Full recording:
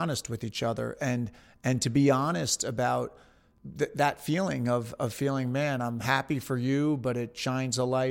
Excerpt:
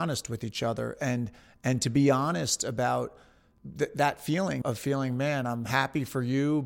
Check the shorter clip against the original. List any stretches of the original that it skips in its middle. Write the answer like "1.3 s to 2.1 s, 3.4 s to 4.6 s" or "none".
4.6 s to 5.0 s